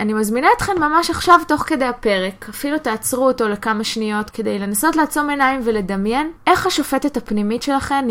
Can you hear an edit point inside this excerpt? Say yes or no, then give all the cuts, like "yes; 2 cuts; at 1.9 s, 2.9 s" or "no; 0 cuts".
yes; 2 cuts; at 4.3 s, 6.4 s